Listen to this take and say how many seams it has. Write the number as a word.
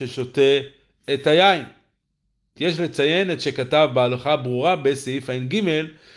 one